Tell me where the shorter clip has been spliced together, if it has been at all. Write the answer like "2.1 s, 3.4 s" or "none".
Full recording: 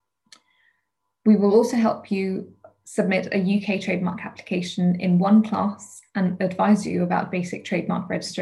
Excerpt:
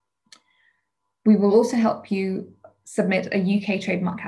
none